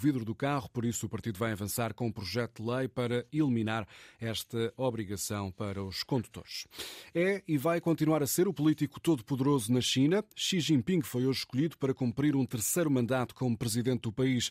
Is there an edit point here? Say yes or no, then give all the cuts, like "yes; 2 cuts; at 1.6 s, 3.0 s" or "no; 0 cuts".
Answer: no; 0 cuts